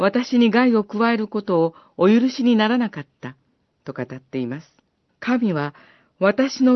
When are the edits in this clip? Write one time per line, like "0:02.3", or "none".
0:05.1